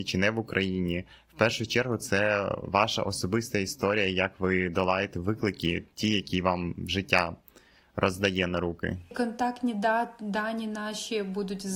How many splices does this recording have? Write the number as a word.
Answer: zero